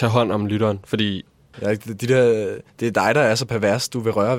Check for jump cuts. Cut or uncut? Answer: cut